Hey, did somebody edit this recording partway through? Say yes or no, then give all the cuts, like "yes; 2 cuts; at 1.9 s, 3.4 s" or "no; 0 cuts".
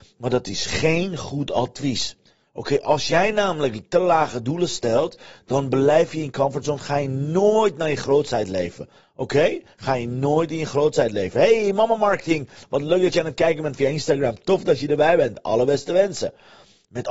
no; 0 cuts